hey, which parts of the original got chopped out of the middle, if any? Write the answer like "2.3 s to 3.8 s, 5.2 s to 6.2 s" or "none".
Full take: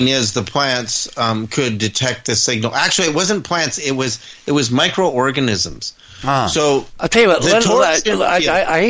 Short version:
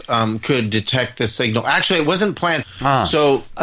3.7 s to 6.1 s